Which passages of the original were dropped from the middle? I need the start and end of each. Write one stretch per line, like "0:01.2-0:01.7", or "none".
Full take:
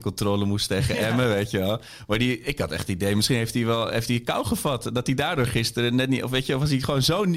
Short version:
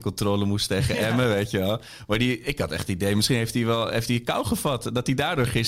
none